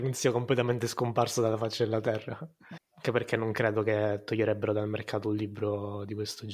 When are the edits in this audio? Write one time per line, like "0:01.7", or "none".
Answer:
0:02.8